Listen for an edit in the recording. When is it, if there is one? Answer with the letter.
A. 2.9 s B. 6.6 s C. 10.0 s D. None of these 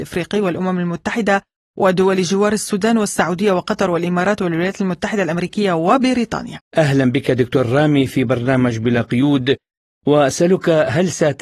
B